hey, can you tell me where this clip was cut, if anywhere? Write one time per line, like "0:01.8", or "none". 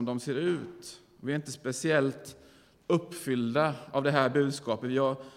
none